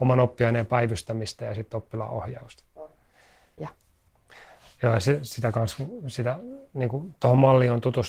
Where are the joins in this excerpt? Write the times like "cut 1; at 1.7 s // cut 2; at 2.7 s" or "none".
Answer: cut 1; at 3.6 s